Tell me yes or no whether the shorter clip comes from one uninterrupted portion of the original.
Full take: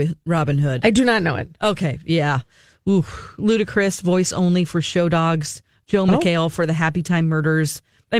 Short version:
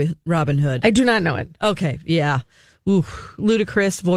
yes